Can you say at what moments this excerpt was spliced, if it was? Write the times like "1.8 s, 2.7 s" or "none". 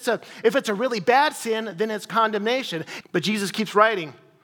3.0 s